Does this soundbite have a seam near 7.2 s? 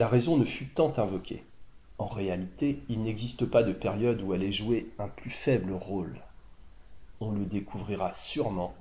no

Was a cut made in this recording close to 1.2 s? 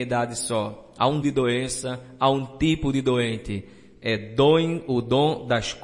yes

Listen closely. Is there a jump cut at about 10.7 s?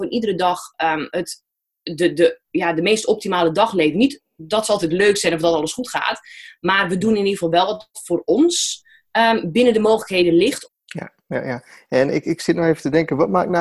yes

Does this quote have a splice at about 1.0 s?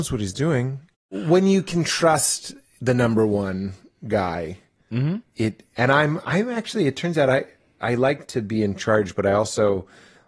no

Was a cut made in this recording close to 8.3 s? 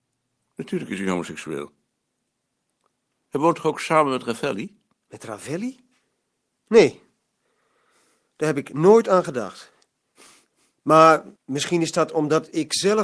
no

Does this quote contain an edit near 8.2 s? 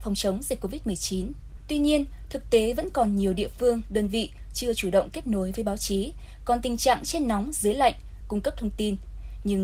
yes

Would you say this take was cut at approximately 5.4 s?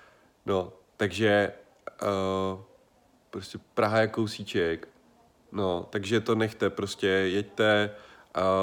no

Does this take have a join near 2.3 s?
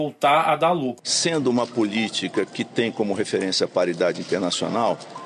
no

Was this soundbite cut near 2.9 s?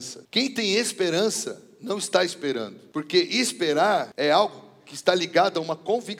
no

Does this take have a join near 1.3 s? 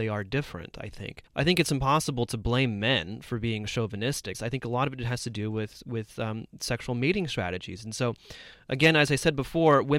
yes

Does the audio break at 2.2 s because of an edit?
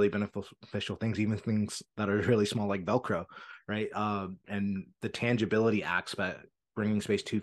no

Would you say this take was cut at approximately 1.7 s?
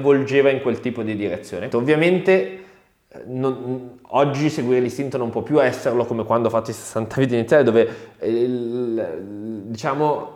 yes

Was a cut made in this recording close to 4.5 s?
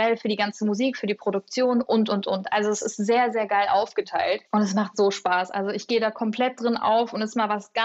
yes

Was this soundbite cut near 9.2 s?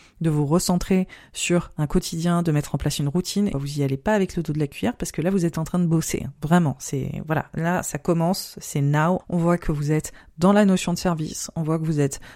yes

